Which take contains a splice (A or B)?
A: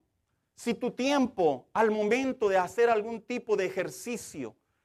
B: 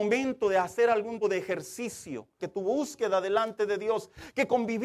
B